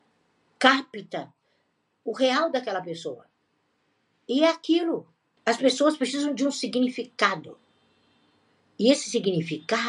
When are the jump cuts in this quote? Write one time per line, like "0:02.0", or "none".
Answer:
0:05.4